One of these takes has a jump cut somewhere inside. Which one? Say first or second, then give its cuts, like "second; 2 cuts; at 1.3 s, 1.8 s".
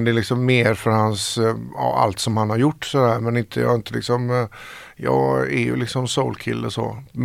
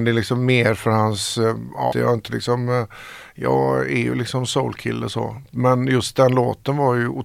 second; 1 cut; at 1.9 s